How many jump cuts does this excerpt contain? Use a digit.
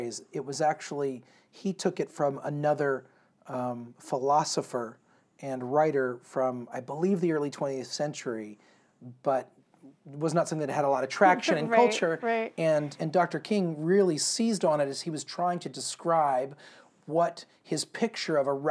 1